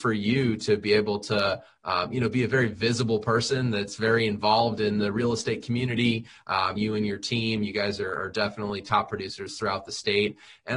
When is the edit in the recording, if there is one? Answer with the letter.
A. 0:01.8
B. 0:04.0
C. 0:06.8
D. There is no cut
C